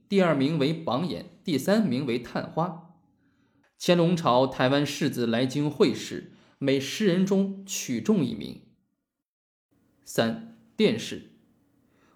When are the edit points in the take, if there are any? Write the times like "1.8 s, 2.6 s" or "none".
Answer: 3.6 s